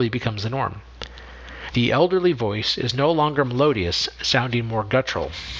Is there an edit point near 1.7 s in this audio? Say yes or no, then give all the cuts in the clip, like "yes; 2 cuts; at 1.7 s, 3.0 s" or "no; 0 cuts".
yes; 1 cut; at 1.7 s